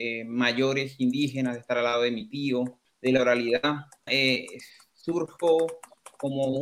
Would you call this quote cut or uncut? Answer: cut